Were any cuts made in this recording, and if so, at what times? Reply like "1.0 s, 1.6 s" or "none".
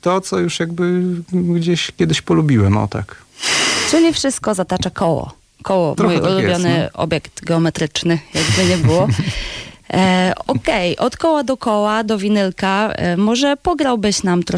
none